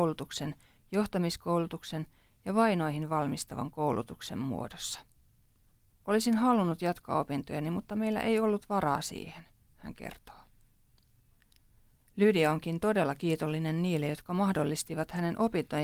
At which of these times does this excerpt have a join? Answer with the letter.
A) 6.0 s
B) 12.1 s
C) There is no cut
A